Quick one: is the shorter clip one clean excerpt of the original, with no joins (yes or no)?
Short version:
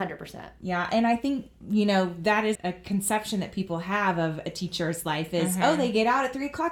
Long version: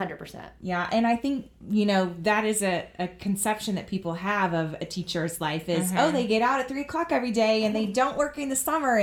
no